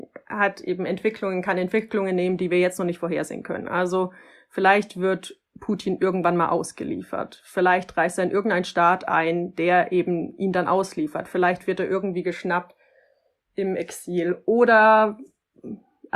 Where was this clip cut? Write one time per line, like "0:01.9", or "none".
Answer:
none